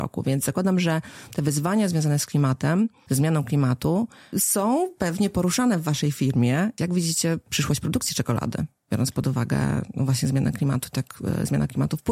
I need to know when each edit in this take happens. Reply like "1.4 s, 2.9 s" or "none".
6.8 s

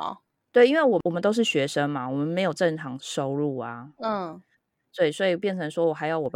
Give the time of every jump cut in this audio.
3.0 s

